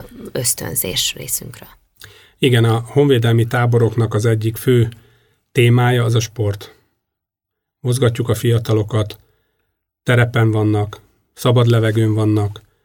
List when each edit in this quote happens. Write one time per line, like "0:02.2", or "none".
none